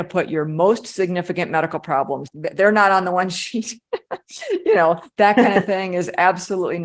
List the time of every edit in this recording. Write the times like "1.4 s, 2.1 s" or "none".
2.3 s